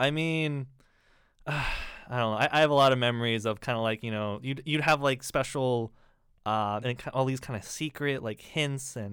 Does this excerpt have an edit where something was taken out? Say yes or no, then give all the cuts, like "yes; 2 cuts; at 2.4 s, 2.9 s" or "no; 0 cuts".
yes; 1 cut; at 6.8 s